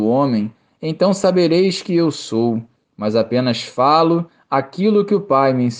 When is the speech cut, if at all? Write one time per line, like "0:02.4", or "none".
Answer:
0:02.8